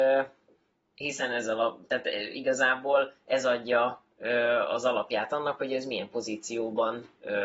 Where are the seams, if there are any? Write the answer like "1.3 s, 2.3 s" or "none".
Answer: none

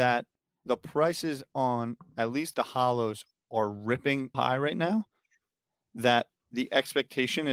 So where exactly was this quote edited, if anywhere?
4.3 s

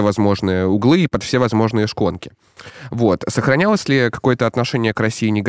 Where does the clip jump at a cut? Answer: none

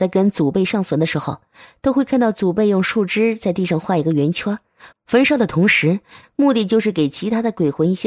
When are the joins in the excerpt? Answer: 4.9 s, 6.2 s

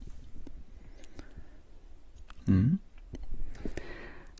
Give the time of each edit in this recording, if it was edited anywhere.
2.4 s

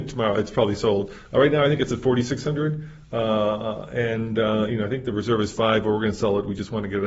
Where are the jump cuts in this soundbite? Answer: none

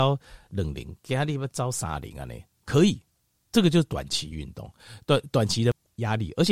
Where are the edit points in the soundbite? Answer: none

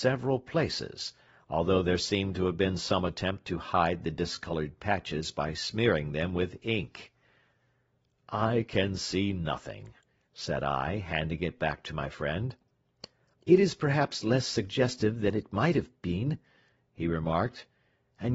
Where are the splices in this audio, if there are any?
13.3 s

